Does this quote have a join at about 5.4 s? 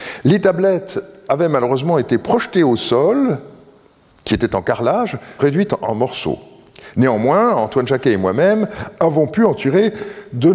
yes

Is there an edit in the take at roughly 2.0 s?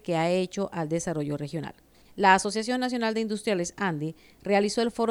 yes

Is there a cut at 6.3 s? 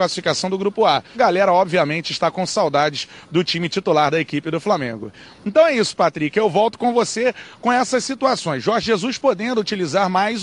no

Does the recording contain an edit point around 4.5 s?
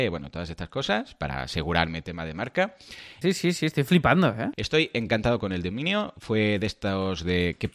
yes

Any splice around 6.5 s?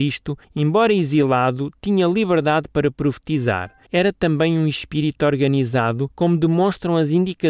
no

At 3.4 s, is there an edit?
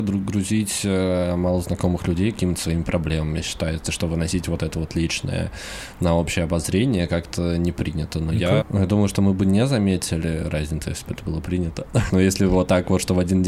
no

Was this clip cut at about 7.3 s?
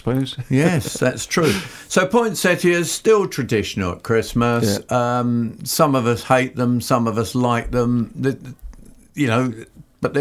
no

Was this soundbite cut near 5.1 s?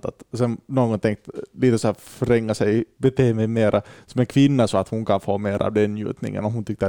no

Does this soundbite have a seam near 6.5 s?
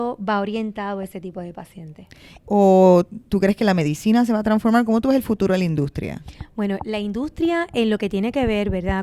no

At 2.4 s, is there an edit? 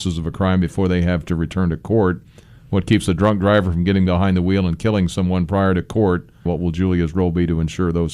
no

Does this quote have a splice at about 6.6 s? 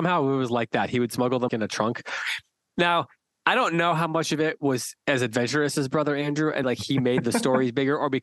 yes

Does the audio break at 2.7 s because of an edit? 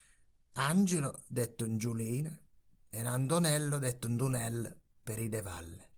yes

